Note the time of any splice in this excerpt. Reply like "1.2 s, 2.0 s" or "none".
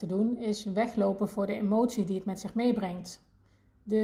none

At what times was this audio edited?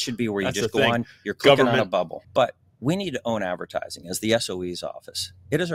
2.2 s

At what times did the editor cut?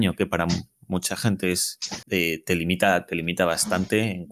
2.0 s

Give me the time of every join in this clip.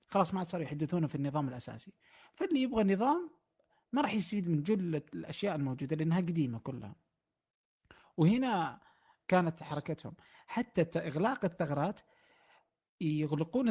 none

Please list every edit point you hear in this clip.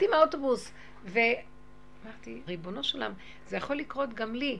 2.5 s

